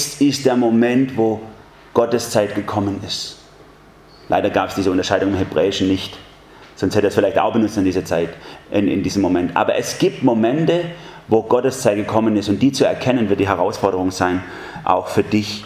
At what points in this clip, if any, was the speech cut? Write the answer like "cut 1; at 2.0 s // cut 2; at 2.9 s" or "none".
none